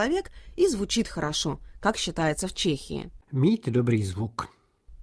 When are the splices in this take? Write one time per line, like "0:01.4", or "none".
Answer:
0:03.2